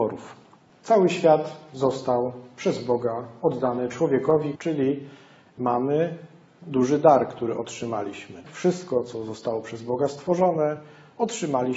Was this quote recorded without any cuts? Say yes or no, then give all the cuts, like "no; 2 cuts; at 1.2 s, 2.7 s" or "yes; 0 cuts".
no; 1 cut; at 4.5 s